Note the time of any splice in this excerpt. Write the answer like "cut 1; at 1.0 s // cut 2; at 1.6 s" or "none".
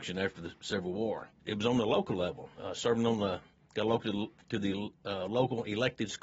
cut 1; at 1.3 s

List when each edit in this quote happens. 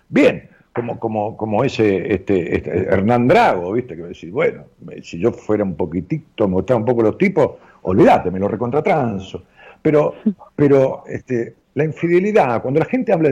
cut 1; at 11.6 s

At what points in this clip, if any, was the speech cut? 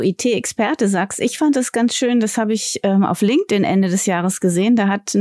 none

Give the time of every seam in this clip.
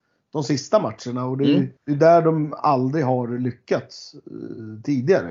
cut 1; at 1.8 s

